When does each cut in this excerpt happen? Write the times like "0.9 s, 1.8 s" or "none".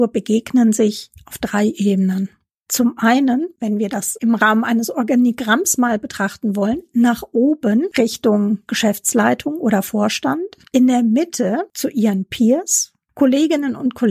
10.7 s